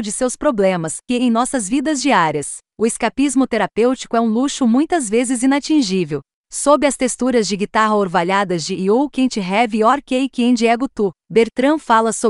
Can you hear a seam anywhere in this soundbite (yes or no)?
yes